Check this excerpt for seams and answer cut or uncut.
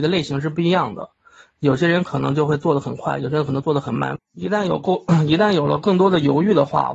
cut